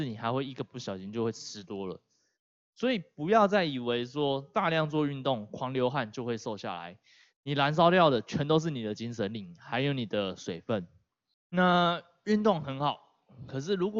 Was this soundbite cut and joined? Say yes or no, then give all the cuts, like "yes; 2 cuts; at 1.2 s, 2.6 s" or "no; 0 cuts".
no; 0 cuts